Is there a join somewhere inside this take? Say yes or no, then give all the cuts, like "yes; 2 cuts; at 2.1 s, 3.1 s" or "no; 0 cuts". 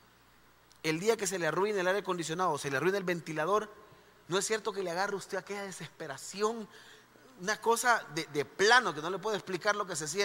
no; 0 cuts